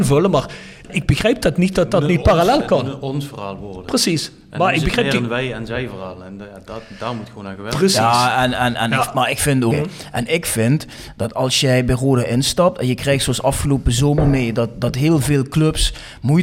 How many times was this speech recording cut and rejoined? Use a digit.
1